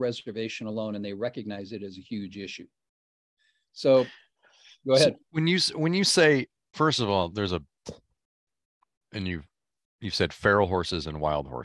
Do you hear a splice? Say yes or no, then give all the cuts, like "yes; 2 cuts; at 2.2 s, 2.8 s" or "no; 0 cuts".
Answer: yes; 1 cut; at 6.7 s